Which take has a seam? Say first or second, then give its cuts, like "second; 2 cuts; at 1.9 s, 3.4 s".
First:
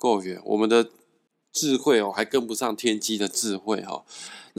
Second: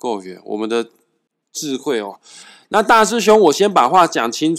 second; 1 cut; at 2.1 s